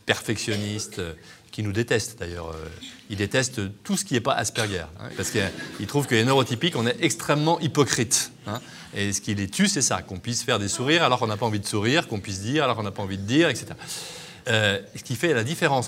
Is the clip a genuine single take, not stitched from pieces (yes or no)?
no